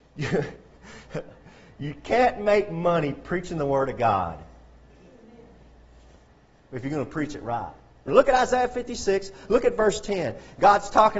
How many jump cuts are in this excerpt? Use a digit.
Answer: 1